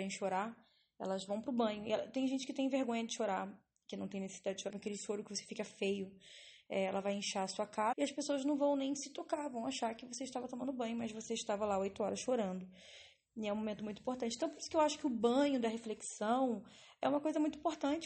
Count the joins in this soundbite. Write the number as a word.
three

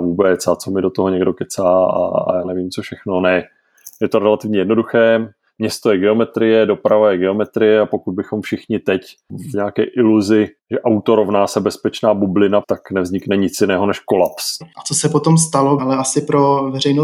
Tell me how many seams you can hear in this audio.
three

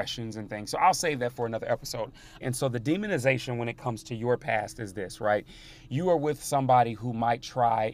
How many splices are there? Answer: one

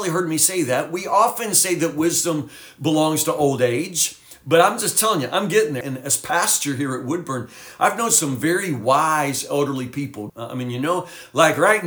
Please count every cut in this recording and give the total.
two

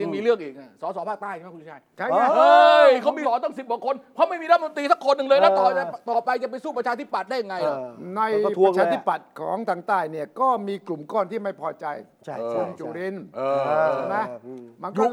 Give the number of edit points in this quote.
one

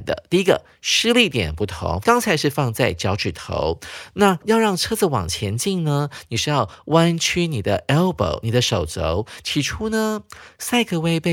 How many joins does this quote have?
two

